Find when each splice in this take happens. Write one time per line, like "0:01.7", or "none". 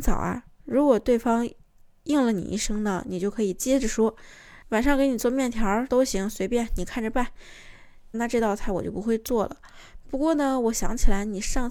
0:05.9
0:08.1